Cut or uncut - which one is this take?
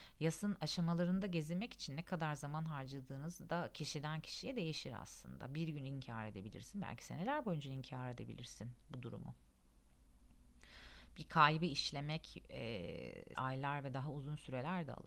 cut